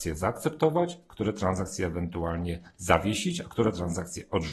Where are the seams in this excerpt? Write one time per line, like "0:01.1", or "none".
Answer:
none